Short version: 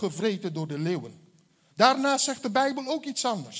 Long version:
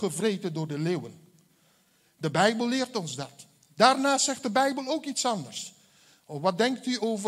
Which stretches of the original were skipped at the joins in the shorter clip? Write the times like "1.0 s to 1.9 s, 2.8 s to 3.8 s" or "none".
1.7 s to 3.7 s